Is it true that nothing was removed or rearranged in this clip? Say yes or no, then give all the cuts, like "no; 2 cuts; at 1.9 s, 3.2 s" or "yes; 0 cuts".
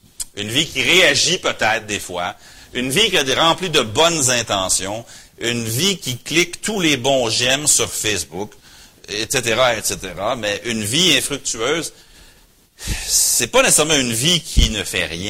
yes; 0 cuts